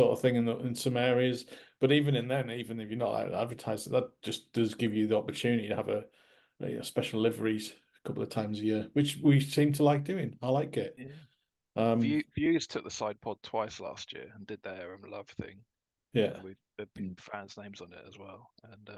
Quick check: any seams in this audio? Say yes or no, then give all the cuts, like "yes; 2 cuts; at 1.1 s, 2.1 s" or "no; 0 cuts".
no; 0 cuts